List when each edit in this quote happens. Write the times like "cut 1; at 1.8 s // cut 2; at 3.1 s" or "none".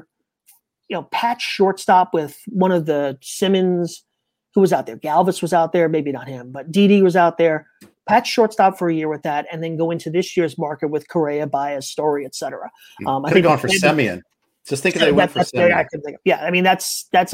none

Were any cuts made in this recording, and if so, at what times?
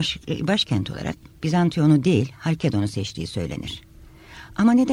none

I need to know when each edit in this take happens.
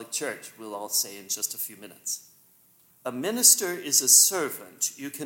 cut 1; at 2.9 s

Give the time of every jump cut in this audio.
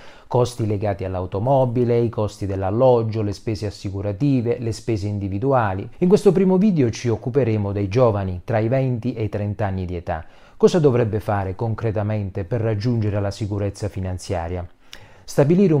cut 1; at 5.9 s

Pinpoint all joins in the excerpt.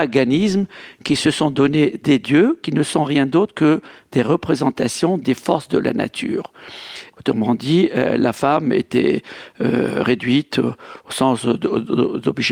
cut 1; at 7.1 s

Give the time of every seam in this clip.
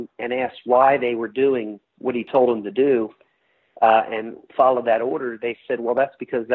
none

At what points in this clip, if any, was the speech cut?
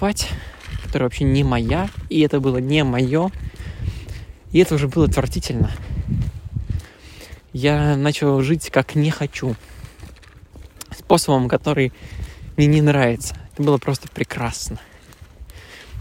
cut 1; at 13.5 s

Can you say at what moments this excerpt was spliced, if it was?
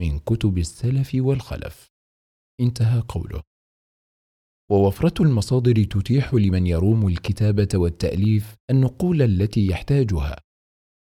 cut 1; at 8.6 s

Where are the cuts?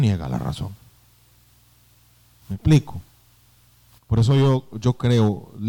cut 1; at 2.4 s

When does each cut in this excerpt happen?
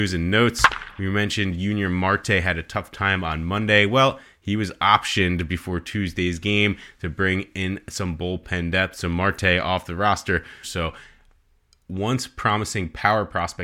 cut 1; at 10.6 s

